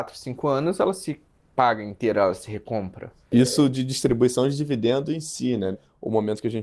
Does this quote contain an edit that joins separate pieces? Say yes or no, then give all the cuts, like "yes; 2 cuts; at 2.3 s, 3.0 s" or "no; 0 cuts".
yes; 1 cut; at 5.7 s